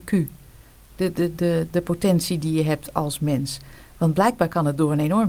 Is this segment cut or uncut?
uncut